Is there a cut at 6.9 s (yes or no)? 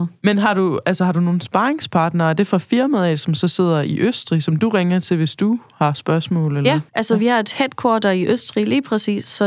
yes